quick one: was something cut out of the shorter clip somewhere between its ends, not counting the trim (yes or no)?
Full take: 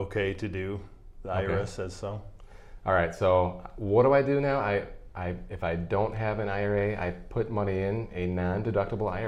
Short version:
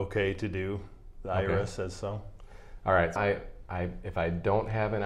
yes